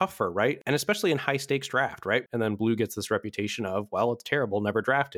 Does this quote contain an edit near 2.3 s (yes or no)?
yes